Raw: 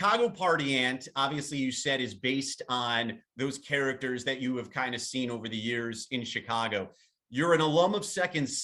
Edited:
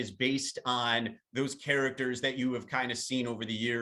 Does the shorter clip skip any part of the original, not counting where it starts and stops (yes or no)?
no